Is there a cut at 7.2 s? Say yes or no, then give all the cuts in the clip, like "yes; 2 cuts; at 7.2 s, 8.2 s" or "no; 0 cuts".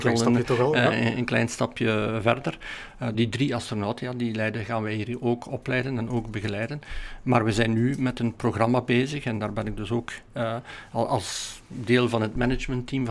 no; 1 cut; at 3.1 s